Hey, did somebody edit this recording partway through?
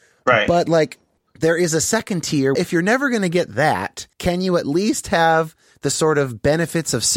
yes; 2 cuts; at 2.6 s, 4.1 s

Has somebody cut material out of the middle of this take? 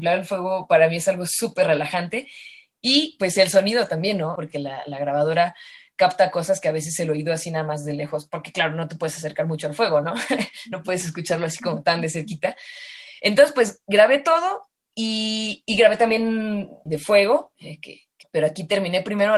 yes; 3 cuts; at 4.4 s, 16.9 s, 18.2 s

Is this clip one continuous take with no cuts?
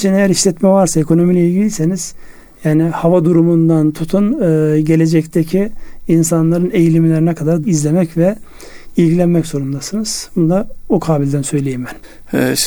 no; 1 cut; at 7.6 s

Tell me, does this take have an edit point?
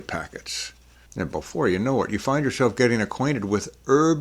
yes; 1 cut; at 1.1 s

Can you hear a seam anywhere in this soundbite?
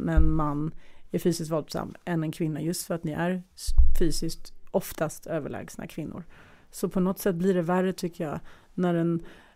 no; 0 cuts

